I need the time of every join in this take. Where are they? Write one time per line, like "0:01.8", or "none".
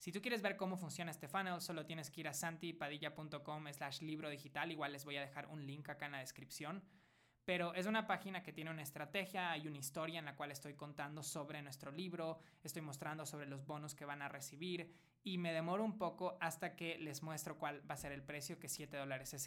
none